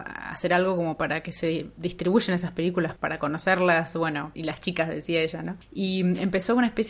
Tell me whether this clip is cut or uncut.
cut